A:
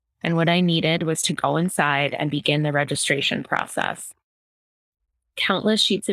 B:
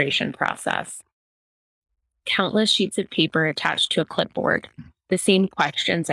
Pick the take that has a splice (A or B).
B